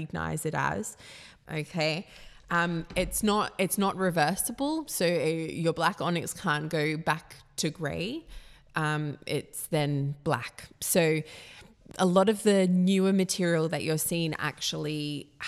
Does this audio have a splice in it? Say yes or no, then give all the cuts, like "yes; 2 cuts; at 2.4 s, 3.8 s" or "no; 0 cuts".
yes; 1 cut; at 1.4 s